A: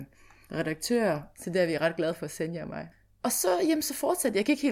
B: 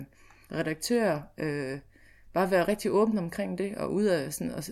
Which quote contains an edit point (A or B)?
A